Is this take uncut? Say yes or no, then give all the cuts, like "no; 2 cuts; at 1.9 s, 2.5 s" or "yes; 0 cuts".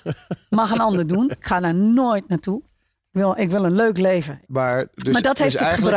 yes; 0 cuts